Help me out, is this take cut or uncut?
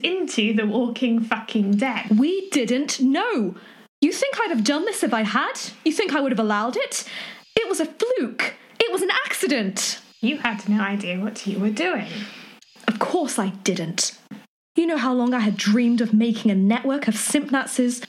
uncut